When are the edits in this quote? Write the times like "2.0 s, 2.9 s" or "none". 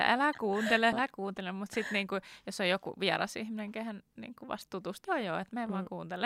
0.9 s, 5.0 s